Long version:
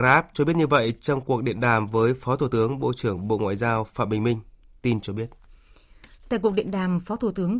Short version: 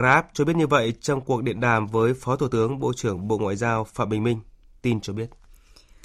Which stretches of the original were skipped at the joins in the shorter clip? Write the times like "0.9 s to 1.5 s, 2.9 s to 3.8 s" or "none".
none